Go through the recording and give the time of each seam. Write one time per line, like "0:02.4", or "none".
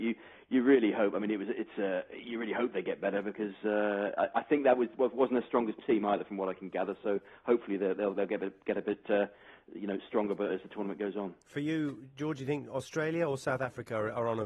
none